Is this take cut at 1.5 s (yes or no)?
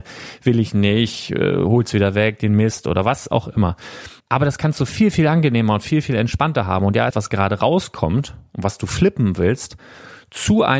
no